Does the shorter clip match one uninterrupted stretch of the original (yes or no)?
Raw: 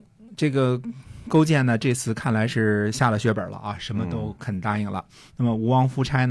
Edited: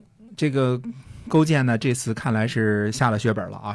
yes